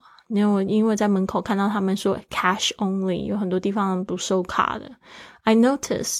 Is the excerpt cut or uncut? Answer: uncut